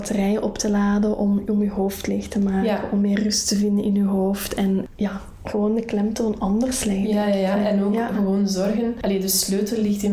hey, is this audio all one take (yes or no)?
yes